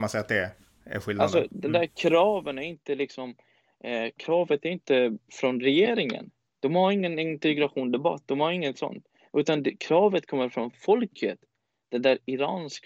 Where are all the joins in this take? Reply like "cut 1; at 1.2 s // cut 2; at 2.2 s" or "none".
cut 1; at 6.5 s